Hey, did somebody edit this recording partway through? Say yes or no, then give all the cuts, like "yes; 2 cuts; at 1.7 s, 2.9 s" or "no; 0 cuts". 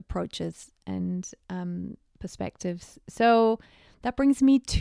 no; 0 cuts